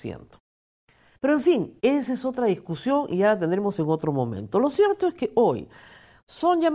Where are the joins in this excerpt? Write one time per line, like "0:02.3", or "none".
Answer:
0:01.2